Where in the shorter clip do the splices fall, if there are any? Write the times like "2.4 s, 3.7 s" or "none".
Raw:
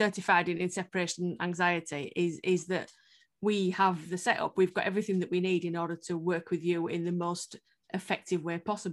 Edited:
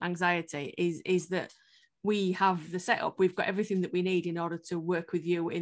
none